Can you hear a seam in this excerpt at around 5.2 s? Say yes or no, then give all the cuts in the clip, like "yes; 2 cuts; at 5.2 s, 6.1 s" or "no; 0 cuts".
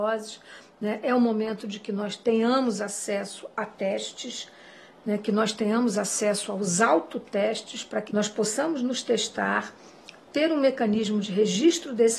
no; 1 cut; at 8.1 s